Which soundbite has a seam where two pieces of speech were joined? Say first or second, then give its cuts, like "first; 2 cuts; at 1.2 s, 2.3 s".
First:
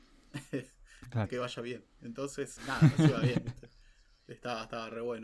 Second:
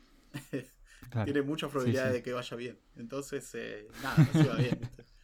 first; 2 cuts; at 1.3 s, 2.6 s